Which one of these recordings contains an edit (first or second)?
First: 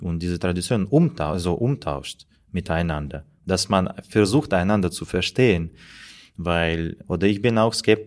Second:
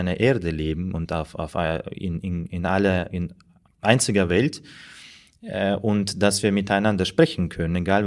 first